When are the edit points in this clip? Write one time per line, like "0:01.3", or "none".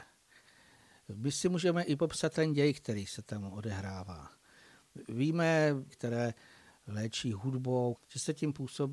0:05.9
0:08.0